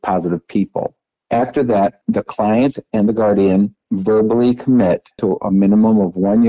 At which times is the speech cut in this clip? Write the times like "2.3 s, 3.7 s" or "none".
none